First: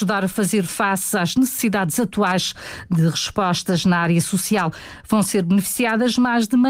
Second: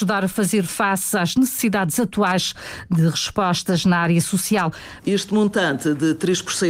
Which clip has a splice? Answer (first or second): second